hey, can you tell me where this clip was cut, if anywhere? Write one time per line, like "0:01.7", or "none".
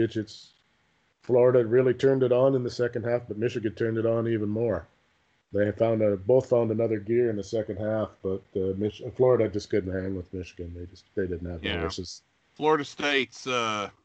none